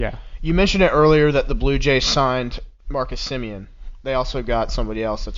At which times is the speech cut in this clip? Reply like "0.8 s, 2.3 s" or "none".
2.8 s, 4.0 s

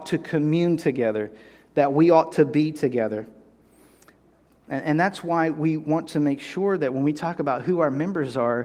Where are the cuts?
4.5 s

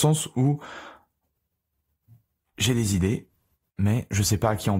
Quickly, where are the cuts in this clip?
3.7 s

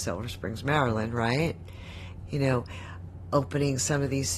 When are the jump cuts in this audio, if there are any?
2.2 s

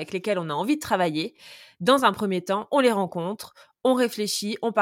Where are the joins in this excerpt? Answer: none

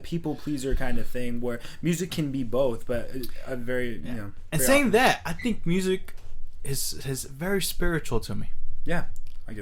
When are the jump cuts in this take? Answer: none

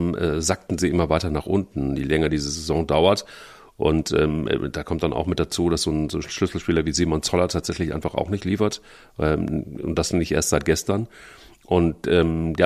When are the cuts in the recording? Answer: none

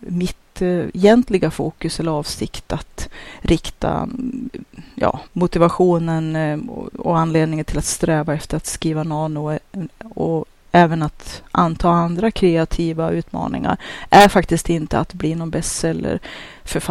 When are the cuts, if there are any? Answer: 5.3 s

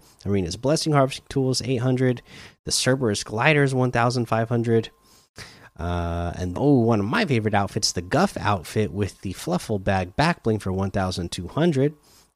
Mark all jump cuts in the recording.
6.5 s

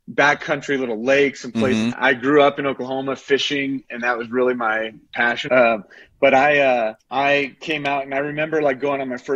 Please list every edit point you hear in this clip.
1.9 s, 5.5 s, 7.0 s

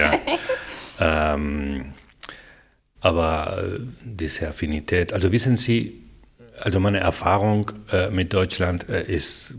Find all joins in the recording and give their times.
none

